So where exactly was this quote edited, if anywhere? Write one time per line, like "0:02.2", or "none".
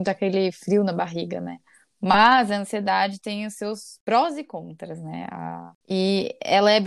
none